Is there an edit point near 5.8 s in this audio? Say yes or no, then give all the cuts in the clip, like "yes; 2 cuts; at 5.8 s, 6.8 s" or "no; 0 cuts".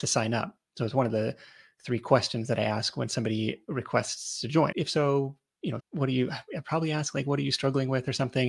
yes; 2 cuts; at 4.7 s, 5.8 s